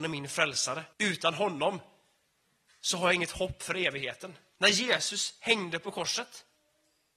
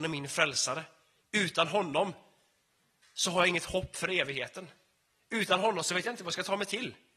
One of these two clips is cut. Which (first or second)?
first